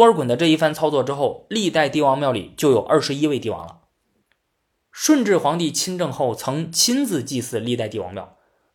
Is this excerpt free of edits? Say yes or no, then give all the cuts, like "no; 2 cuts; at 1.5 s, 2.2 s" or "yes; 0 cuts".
yes; 0 cuts